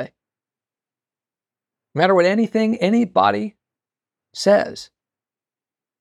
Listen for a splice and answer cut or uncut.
uncut